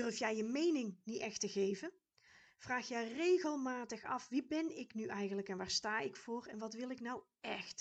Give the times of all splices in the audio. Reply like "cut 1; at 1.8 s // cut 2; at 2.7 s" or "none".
none